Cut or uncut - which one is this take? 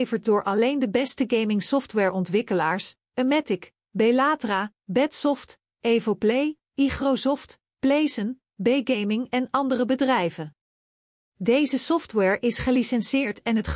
uncut